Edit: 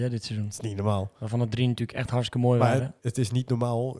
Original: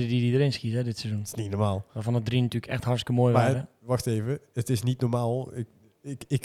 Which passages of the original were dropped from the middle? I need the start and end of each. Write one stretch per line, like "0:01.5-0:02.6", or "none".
0:03.7-0:04.5